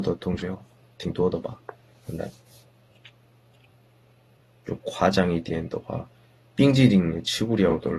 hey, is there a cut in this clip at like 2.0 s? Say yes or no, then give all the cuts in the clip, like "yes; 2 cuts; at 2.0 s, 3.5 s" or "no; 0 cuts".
no; 0 cuts